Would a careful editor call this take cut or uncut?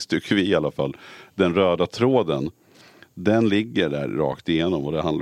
uncut